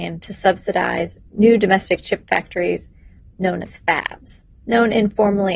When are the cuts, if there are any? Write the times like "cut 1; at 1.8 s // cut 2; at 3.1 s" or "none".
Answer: cut 1; at 4.6 s